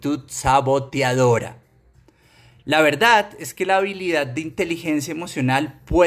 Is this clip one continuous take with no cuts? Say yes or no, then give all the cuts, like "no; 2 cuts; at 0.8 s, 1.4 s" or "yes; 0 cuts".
yes; 0 cuts